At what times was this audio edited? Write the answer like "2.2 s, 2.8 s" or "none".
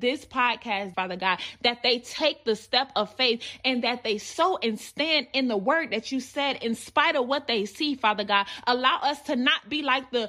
0.9 s